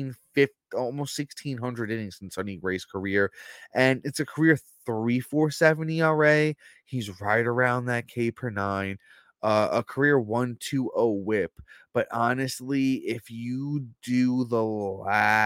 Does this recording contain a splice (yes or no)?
no